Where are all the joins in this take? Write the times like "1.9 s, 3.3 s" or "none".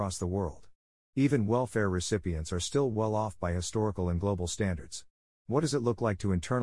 none